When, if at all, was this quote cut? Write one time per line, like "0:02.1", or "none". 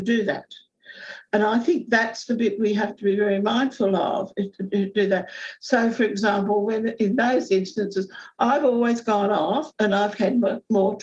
none